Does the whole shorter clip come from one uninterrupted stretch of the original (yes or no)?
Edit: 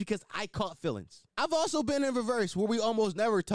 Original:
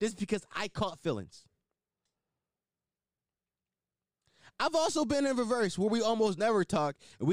no